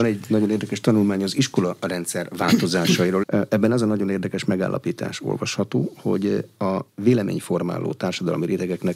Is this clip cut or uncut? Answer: cut